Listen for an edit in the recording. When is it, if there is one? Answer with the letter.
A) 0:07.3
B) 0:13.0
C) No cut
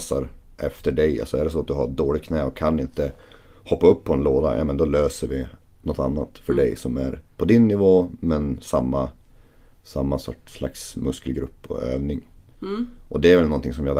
A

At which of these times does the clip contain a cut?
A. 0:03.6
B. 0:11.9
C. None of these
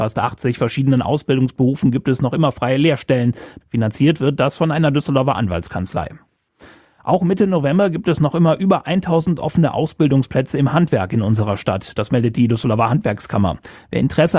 A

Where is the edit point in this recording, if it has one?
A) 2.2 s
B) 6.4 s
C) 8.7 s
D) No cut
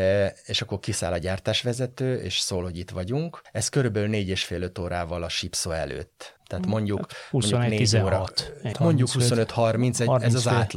C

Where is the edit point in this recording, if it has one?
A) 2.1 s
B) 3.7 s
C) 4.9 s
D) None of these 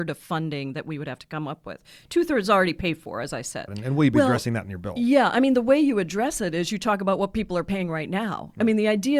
B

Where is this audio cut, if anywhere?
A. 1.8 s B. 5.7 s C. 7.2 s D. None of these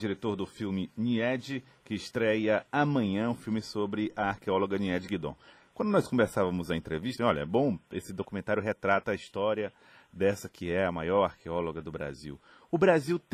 C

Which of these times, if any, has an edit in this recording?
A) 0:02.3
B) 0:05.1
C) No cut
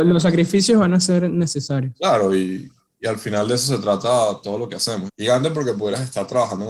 B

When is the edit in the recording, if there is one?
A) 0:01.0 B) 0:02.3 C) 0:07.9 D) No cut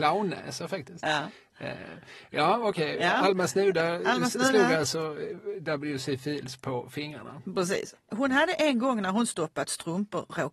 C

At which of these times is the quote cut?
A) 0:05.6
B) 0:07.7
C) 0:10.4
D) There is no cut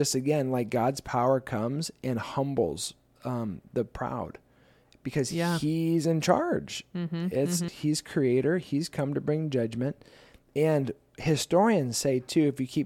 B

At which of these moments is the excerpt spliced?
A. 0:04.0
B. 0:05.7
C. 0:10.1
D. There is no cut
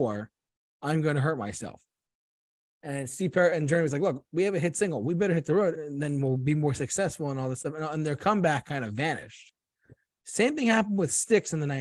B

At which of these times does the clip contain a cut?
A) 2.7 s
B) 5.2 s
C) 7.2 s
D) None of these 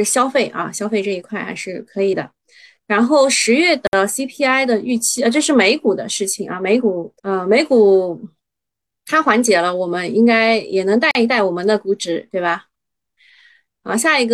C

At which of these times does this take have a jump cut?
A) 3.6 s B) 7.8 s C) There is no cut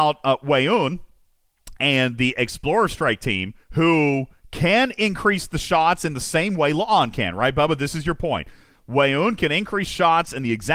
A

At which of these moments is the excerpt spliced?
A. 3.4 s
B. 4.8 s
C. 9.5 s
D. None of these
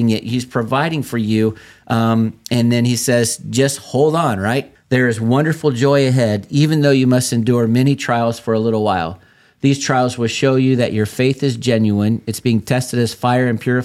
B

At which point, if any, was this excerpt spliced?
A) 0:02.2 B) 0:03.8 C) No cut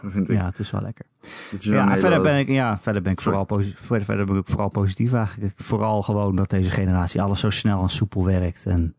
C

